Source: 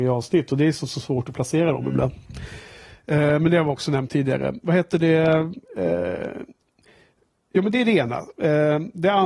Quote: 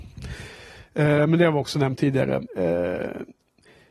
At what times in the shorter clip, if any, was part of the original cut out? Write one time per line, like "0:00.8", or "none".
0:02.5